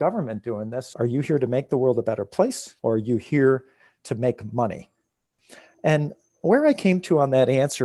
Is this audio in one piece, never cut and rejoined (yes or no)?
no